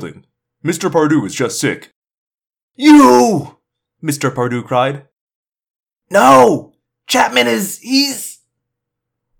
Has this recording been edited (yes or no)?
no